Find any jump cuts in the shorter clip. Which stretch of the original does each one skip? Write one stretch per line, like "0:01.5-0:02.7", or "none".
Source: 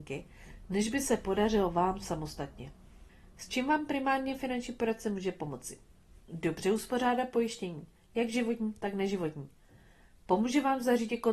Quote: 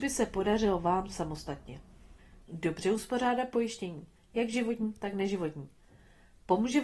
0:03.3-0:06.2